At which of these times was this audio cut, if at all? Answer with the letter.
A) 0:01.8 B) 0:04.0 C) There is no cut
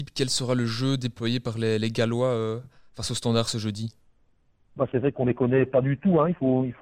C